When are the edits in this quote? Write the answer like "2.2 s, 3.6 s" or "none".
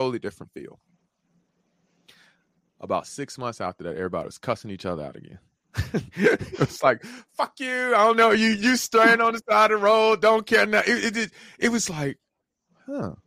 none